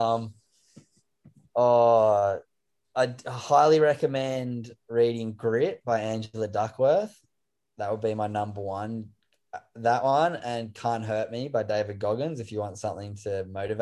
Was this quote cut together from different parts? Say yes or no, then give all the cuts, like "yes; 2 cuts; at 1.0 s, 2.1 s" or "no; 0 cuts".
no; 0 cuts